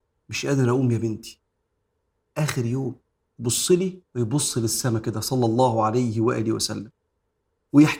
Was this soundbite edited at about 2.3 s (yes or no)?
no